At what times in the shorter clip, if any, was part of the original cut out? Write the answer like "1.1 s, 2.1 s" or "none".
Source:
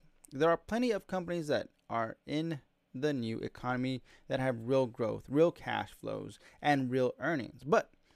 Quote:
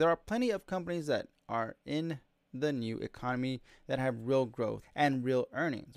4.8 s